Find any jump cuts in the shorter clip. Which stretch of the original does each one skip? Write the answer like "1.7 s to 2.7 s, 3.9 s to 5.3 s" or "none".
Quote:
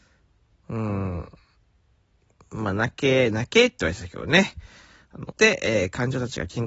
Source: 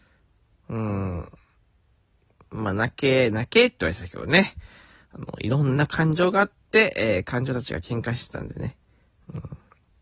5.3 s to 6.7 s